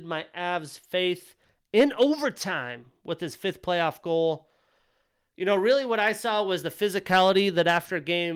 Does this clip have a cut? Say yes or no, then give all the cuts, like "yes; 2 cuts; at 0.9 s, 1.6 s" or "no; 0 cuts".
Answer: no; 0 cuts